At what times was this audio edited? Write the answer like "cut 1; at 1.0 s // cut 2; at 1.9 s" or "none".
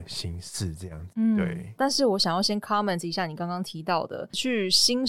cut 1; at 1.8 s